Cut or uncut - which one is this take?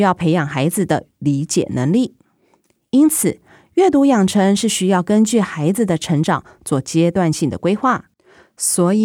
uncut